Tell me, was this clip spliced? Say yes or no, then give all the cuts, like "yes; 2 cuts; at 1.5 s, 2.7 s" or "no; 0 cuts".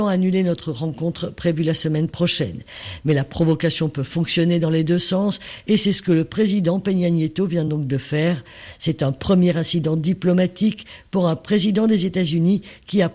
no; 0 cuts